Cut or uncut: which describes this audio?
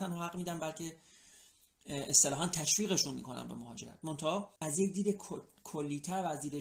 cut